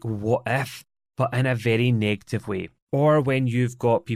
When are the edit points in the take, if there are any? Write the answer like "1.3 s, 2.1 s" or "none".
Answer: 2.8 s